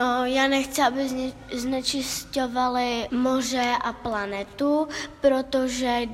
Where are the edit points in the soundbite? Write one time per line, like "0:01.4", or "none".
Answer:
0:03.1